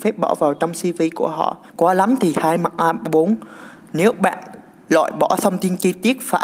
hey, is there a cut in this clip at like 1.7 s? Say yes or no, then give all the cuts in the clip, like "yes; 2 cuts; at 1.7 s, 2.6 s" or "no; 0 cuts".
yes; 1 cut; at 1.7 s